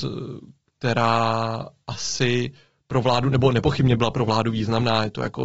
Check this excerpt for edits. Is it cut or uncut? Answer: uncut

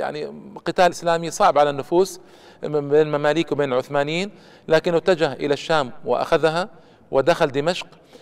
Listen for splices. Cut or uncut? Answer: cut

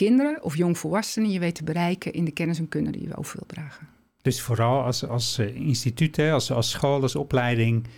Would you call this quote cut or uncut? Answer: uncut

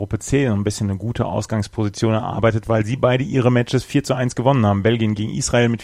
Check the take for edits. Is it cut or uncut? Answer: uncut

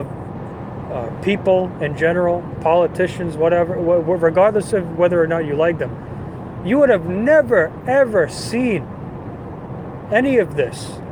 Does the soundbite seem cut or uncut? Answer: uncut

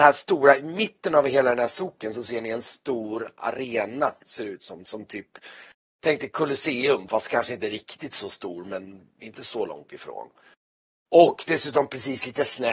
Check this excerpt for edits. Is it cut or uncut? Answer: uncut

